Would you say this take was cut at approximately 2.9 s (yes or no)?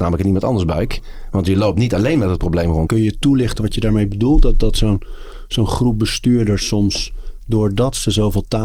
yes